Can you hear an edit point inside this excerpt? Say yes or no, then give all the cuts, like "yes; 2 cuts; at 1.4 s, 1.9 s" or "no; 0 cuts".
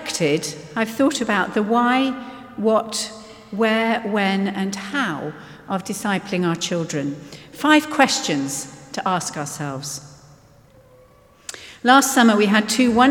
no; 0 cuts